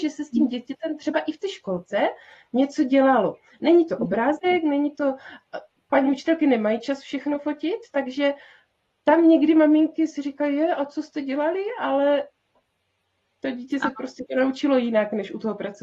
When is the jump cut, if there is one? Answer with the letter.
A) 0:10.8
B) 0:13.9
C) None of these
C